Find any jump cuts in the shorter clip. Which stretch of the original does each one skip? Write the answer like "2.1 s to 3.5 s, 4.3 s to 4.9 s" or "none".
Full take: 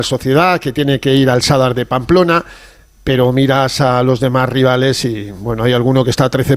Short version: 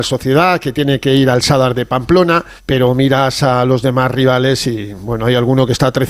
2.6 s to 2.9 s